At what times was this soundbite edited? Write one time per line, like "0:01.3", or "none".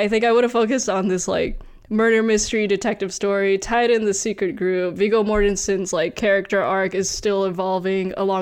none